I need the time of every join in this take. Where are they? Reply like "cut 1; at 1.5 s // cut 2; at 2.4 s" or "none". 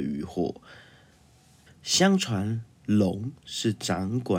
cut 1; at 1.7 s